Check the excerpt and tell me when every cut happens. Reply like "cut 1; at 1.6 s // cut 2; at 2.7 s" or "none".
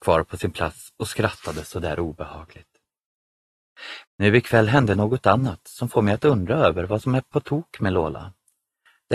cut 1; at 4.0 s